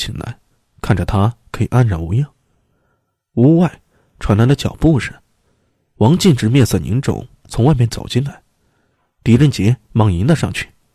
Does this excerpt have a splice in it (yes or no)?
no